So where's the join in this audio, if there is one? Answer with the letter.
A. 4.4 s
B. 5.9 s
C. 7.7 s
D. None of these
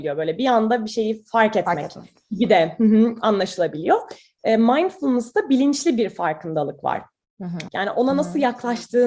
C